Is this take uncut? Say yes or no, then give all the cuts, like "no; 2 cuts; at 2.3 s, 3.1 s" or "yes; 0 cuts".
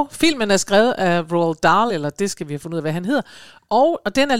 no; 1 cut; at 1.9 s